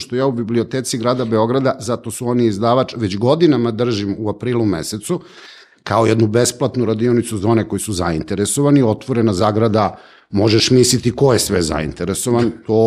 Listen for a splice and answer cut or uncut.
uncut